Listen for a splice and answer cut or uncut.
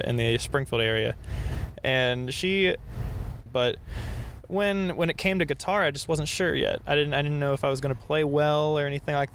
cut